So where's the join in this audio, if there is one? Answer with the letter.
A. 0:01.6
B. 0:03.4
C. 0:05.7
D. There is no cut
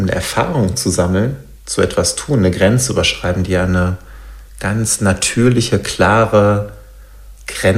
A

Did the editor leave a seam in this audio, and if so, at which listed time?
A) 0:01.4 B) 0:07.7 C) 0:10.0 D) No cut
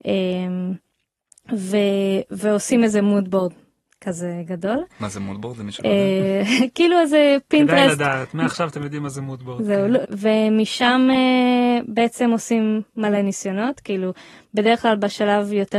C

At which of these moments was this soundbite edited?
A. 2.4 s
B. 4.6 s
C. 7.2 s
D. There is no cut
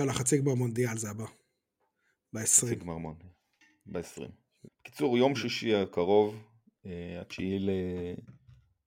B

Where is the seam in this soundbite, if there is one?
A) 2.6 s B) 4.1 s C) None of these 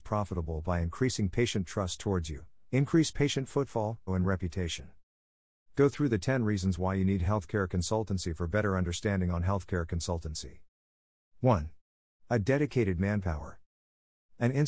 B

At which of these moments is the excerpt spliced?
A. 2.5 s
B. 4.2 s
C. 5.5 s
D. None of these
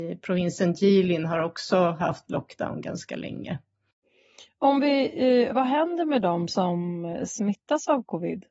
C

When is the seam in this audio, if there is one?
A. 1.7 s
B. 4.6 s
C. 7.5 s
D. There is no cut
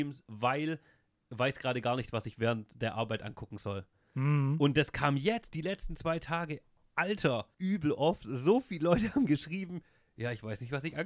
C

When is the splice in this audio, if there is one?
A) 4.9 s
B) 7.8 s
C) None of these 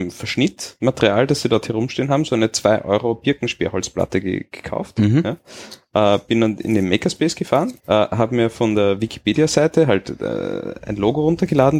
B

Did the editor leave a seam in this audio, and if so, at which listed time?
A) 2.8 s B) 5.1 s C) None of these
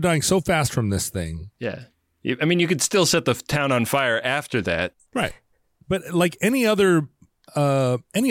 B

